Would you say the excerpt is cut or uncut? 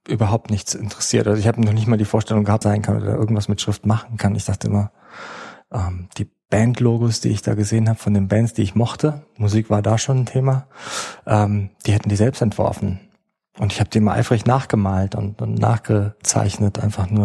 cut